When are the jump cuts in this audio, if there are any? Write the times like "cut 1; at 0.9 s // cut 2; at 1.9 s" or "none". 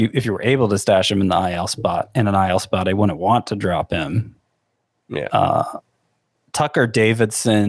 none